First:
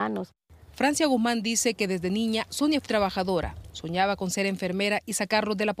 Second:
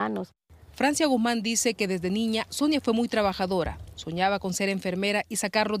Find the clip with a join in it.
first; 1 cut; at 2.9 s

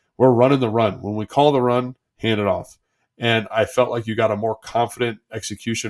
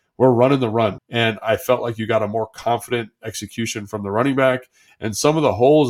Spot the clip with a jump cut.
second; 2 cuts; at 1.0 s, 4.9 s

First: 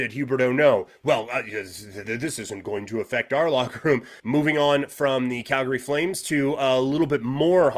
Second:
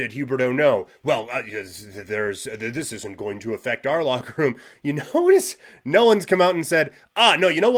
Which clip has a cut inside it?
first; 2 cuts; at 2.0 s, 4.2 s

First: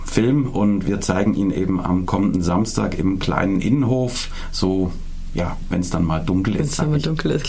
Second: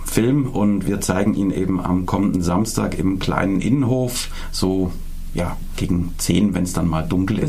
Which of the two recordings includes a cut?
first; 1 cut; at 5.7 s

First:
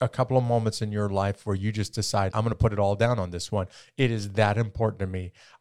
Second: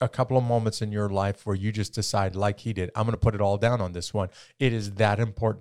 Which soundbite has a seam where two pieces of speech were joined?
first; 1 cut; at 2.3 s

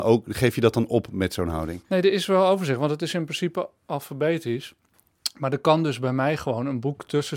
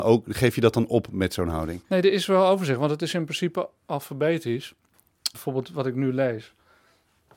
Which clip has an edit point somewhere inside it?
second; 1 cut; at 5.3 s

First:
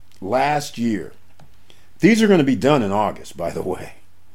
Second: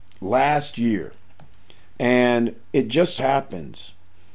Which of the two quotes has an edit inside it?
second; 2 cuts; at 2.0 s, 3.2 s

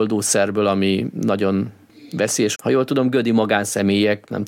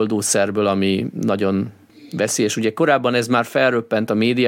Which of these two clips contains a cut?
first; 1 cut; at 2.6 s

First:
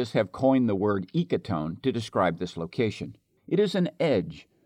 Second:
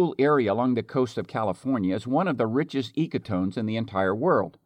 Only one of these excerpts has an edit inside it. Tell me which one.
first; 1 cut; at 3.4 s

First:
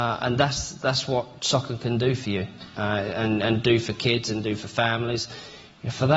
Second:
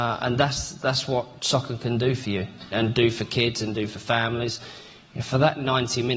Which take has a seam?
second; 1 cut; at 2.7 s

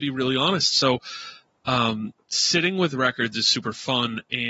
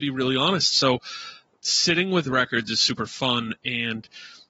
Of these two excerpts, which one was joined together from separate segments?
second; 1 cut; at 1.5 s

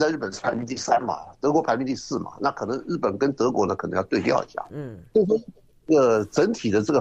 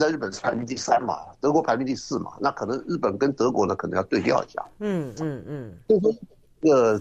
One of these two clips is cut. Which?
first; 1 cut; at 4.7 s

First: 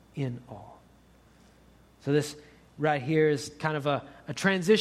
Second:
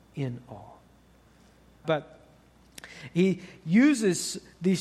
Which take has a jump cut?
second; 1 cut; at 1.8 s

